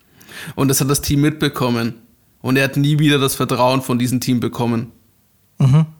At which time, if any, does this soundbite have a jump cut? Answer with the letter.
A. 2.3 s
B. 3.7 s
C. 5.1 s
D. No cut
D